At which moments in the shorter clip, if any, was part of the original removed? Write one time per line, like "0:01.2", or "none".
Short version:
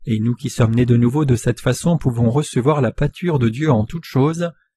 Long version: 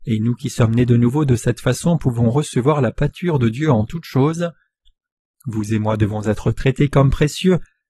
none